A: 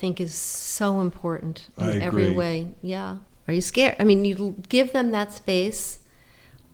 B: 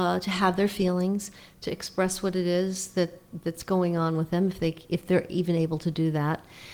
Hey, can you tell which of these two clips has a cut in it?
A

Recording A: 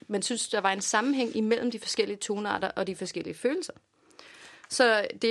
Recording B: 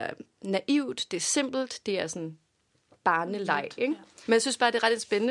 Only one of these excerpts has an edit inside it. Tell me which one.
B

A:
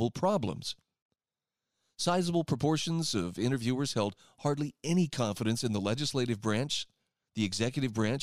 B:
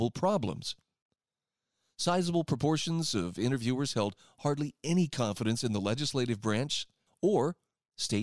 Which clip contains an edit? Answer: B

